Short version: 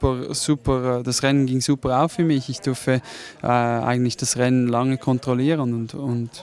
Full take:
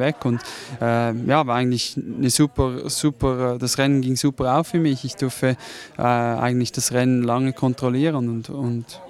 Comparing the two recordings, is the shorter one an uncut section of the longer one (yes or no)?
yes